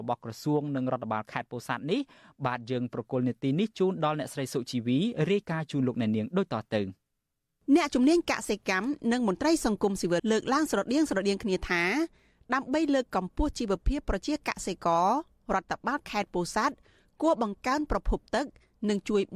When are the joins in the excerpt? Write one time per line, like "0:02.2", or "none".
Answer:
0:10.2